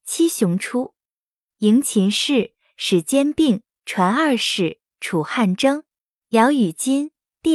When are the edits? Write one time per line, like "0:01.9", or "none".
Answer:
0:06.2